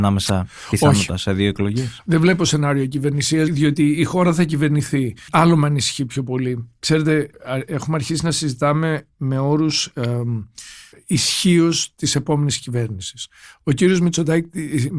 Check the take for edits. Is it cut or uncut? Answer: cut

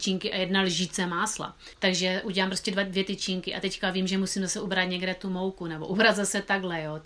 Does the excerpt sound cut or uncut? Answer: cut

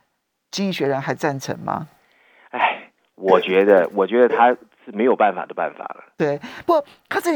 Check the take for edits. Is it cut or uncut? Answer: uncut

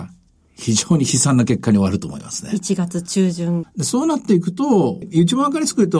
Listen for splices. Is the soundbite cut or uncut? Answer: cut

